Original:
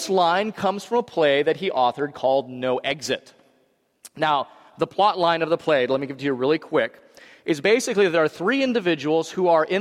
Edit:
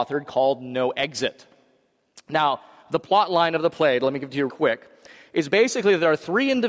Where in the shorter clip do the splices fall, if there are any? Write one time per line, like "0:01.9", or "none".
0:04.5

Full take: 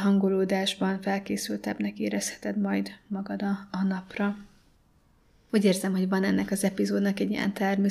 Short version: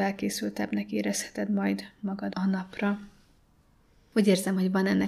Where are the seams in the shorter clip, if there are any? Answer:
0:02.3

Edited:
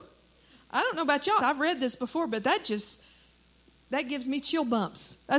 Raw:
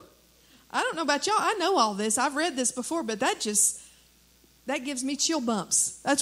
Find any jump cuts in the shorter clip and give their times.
0:01.4

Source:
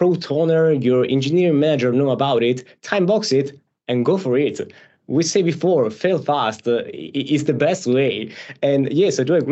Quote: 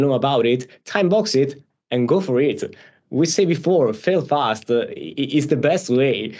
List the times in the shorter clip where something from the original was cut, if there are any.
none

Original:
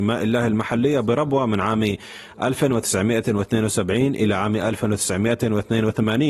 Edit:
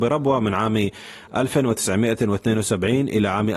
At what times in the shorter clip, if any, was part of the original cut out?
none

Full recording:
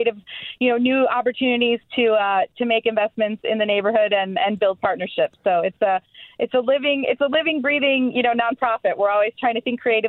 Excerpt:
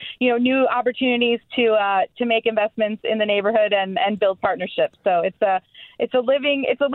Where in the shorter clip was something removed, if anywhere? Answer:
none

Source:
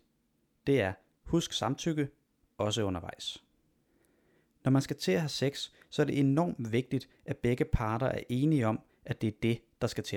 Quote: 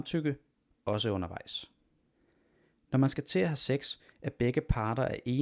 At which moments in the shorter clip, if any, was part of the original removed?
0:04.1

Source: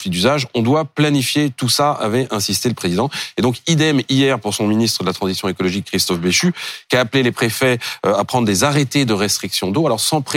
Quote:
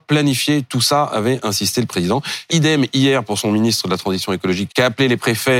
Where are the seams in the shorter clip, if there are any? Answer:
0:02.5
0:04.7

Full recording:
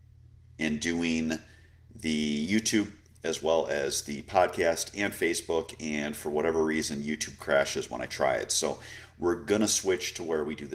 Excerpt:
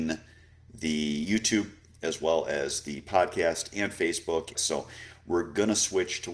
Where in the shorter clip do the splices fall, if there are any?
0:04.5

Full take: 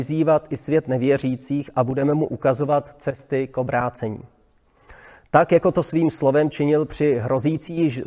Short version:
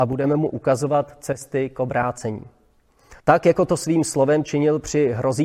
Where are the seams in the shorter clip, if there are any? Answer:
0:03.2

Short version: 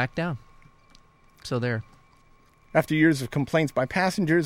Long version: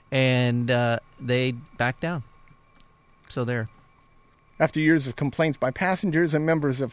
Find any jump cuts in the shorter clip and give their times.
none

